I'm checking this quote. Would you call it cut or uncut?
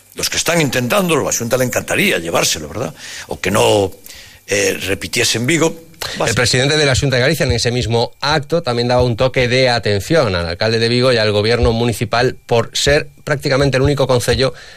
uncut